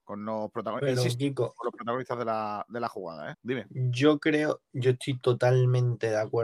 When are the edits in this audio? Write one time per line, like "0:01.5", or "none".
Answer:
0:03.3